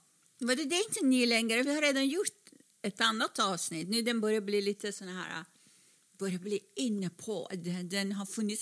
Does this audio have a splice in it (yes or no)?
no